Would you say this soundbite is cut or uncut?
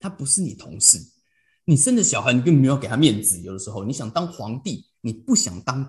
uncut